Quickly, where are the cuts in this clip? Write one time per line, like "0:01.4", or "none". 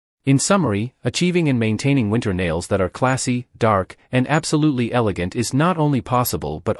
none

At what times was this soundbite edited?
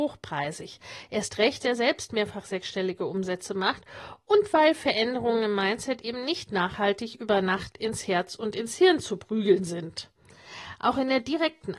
0:01.6

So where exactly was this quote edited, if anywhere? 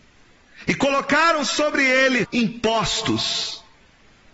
0:02.2

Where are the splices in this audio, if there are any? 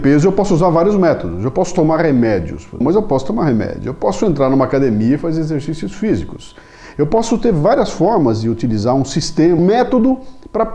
0:02.8
0:06.9
0:09.6

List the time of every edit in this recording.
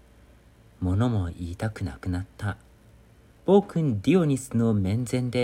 0:03.4

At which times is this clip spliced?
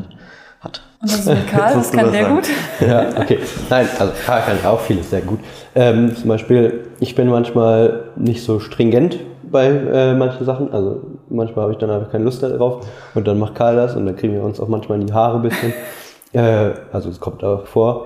0:01.0

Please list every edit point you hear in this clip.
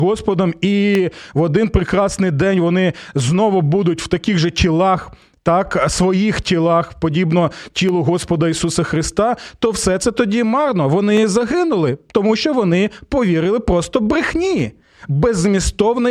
none

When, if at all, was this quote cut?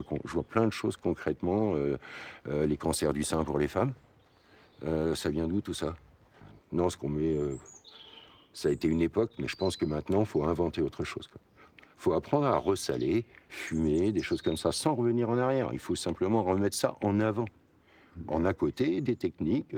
none

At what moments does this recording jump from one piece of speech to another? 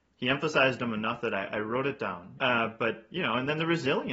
0:02.4

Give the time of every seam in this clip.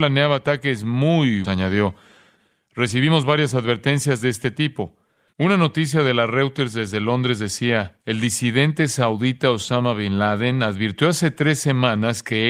0:01.4
0:05.3
0:08.0

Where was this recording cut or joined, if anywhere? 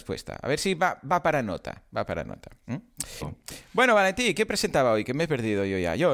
0:03.2

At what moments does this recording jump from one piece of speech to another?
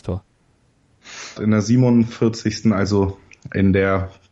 0:01.4

